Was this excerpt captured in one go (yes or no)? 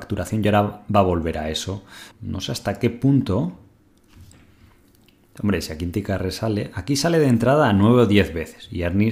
no